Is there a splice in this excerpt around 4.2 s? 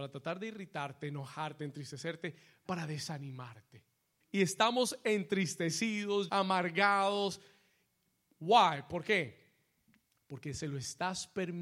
yes; 3 cuts; at 2.6 s, 4.2 s, 6.3 s

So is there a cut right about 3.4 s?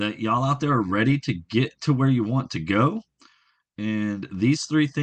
no; 0 cuts

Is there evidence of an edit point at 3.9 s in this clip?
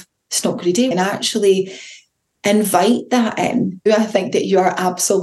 yes; 2 cuts; at 0.9 s, 3.9 s

